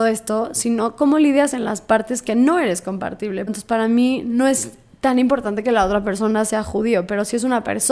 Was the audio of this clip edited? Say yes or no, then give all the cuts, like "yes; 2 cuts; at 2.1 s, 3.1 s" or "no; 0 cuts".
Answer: yes; 1 cut; at 3.5 s